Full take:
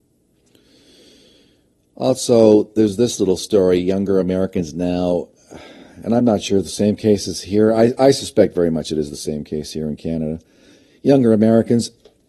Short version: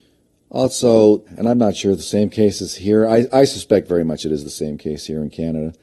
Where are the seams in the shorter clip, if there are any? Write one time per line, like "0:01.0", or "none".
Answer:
0:01.3